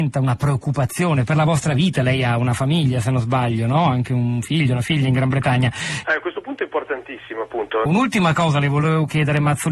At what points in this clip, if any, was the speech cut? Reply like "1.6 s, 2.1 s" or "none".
6.0 s, 7.9 s